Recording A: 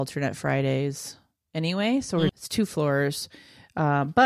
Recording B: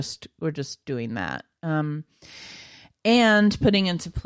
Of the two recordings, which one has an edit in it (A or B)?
A